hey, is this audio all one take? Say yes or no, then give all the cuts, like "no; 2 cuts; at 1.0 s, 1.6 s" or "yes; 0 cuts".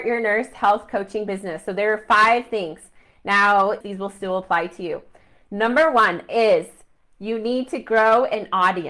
no; 1 cut; at 3.8 s